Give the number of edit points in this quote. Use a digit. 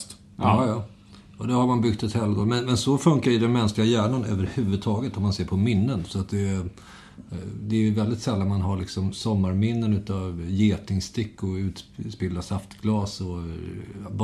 0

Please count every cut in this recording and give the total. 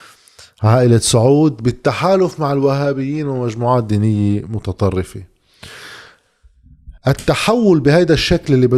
1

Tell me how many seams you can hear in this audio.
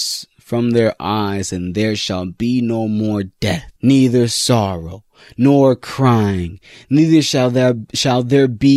1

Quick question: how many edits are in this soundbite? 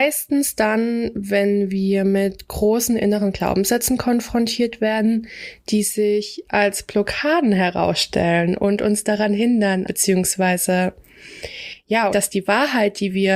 2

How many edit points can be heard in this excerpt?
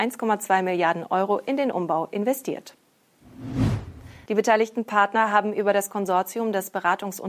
1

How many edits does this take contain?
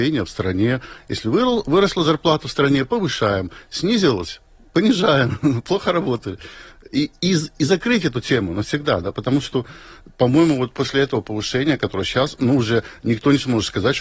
0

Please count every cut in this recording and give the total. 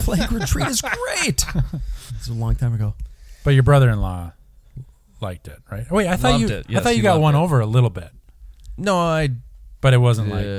1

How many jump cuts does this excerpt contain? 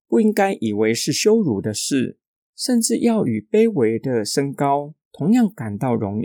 0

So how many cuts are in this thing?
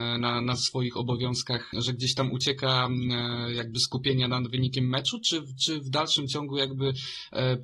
1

